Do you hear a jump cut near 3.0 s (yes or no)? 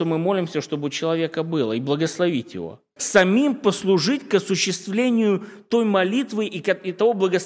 yes